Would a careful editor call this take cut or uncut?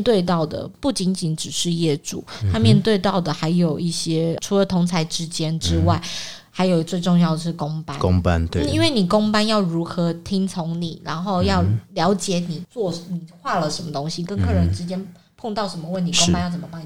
uncut